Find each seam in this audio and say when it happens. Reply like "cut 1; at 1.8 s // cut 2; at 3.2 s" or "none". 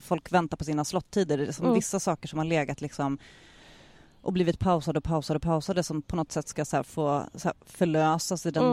none